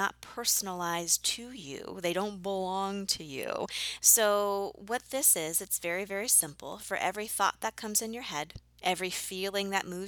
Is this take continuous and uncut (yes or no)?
no